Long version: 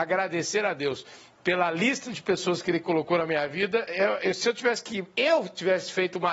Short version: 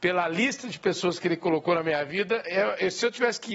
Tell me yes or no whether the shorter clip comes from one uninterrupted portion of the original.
yes